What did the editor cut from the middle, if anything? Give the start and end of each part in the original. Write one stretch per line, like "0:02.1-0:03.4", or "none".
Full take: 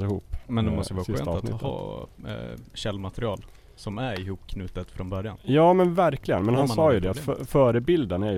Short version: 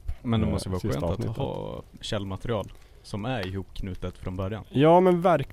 0:02.2-0:02.7